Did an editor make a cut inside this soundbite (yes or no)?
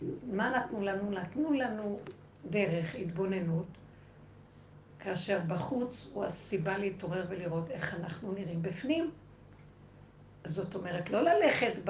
no